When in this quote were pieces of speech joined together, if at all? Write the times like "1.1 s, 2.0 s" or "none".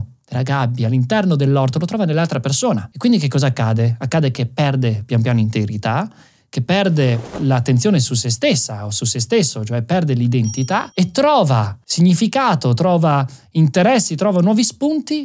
none